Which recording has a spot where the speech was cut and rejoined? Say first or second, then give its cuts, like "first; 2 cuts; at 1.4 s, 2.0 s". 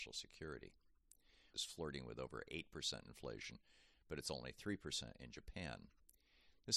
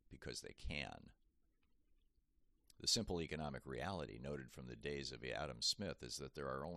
first; 1 cut; at 1.5 s